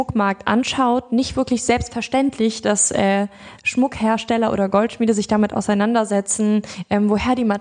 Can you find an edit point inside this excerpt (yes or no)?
no